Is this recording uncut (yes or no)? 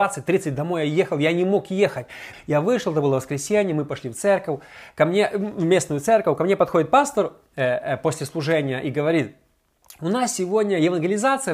no